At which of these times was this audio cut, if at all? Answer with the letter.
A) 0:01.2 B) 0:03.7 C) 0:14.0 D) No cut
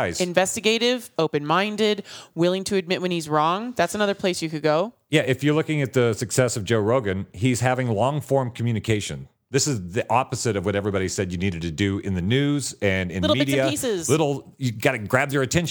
A